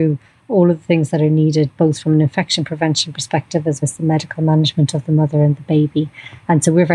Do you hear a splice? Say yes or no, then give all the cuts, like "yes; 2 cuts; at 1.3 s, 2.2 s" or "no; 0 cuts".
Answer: yes; 1 cut; at 3.8 s